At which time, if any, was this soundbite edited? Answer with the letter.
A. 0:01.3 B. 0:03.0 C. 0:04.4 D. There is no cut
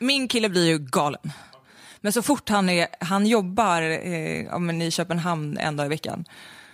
B